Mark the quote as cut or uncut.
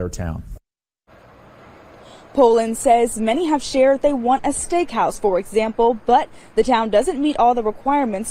uncut